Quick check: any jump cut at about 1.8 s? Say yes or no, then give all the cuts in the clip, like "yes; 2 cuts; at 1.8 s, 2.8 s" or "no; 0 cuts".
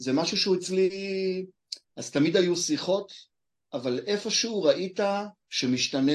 yes; 1 cut; at 1.8 s